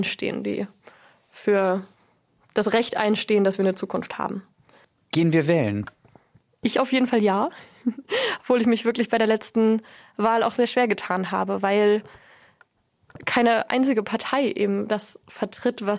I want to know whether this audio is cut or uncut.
uncut